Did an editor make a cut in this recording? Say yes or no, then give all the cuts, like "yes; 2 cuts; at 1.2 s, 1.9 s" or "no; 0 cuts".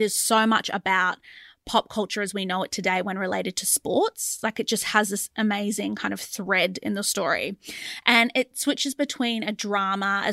no; 0 cuts